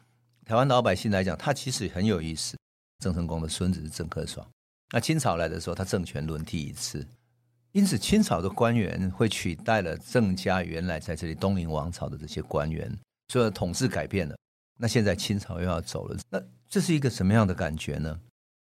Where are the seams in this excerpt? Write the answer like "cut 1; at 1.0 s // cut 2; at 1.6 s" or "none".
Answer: cut 1; at 3.0 s // cut 2; at 16.2 s